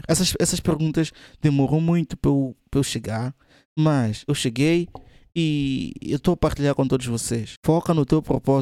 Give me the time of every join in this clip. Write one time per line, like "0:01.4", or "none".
none